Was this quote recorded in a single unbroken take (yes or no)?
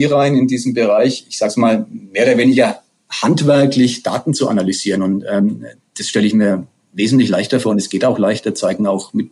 yes